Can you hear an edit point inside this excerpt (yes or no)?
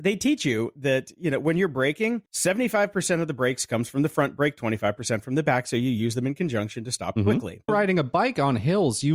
yes